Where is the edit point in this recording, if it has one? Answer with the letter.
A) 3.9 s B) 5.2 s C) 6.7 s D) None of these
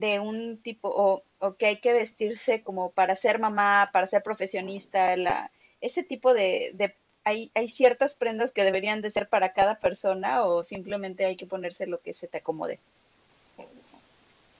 D